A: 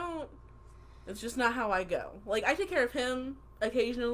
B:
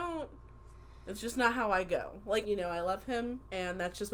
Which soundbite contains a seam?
B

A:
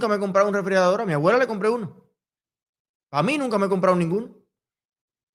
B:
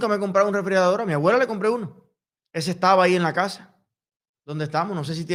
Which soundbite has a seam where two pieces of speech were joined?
B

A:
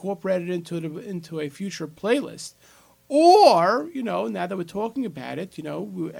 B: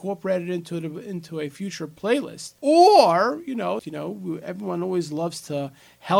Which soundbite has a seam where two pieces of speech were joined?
B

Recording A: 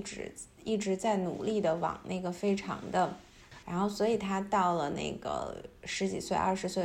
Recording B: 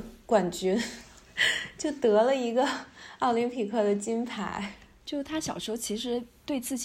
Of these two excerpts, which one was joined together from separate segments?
A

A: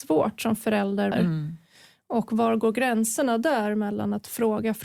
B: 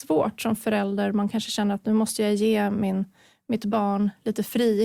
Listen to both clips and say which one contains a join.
A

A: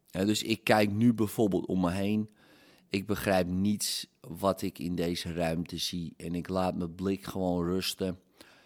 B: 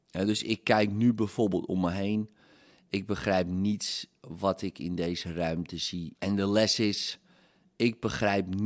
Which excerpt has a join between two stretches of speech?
B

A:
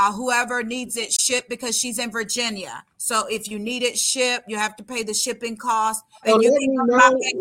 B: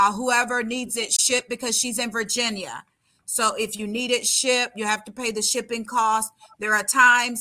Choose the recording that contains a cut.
A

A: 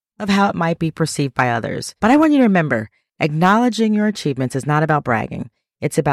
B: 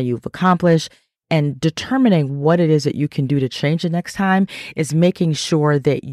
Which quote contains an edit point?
A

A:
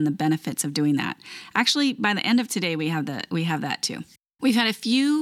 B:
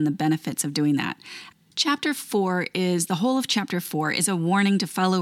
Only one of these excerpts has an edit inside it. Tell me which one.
B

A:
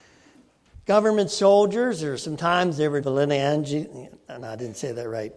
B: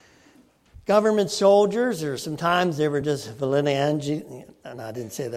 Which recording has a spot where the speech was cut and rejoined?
A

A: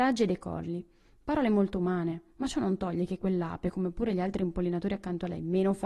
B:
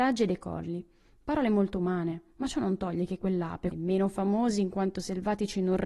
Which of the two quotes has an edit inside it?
B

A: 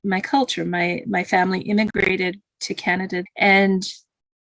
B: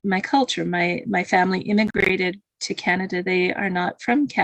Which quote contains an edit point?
A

